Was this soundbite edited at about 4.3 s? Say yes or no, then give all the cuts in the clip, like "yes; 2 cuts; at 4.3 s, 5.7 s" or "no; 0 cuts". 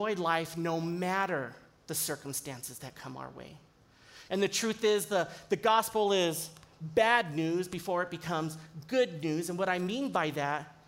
yes; 1 cut; at 4.3 s